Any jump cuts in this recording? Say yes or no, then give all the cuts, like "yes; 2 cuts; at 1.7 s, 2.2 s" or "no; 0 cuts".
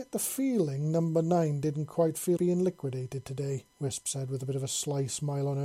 yes; 2 cuts; at 2.4 s, 3.7 s